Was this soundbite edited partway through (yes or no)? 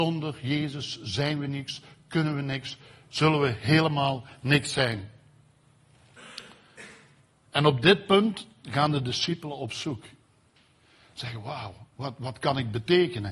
no